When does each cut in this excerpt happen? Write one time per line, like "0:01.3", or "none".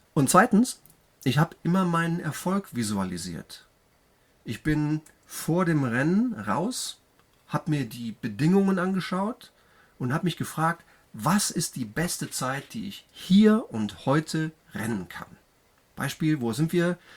none